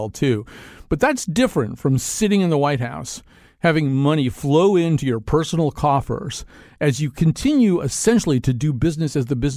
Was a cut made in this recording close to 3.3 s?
no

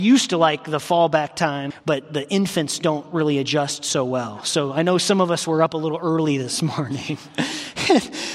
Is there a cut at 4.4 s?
no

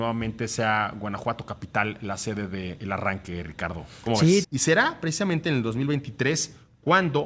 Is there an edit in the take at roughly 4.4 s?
yes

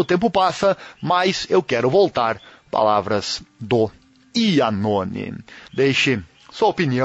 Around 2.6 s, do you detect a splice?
no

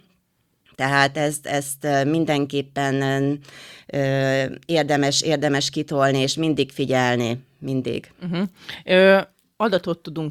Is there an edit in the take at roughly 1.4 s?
no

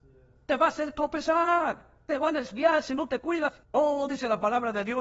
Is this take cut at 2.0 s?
no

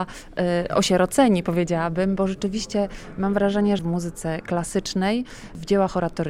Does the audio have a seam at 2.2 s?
no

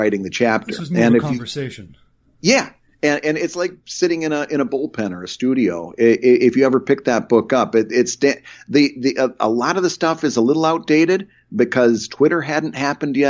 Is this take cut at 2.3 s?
no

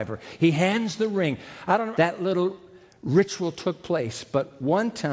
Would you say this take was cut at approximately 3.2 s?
no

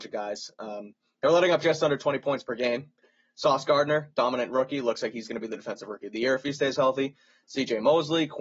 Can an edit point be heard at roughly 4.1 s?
no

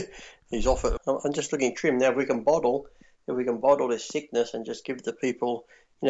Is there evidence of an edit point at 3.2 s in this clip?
no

